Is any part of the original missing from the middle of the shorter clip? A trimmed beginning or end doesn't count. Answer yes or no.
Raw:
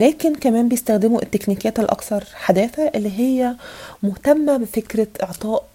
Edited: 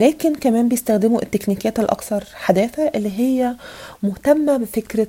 no